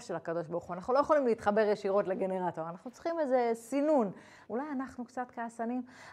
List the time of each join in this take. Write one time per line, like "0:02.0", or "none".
0:04.5